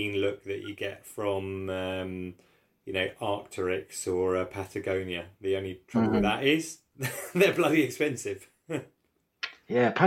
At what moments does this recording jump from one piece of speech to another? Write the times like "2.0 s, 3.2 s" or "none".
none